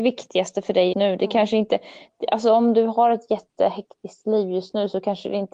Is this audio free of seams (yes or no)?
no